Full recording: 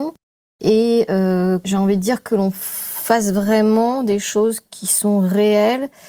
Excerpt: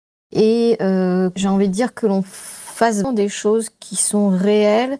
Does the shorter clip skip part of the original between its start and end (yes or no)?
yes